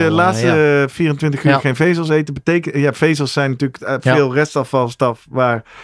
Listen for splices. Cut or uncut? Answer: uncut